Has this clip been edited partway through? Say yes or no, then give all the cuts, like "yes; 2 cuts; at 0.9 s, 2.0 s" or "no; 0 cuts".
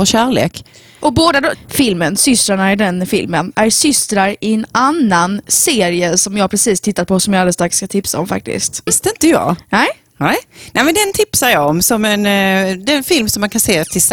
yes; 2 cuts; at 1.5 s, 8.9 s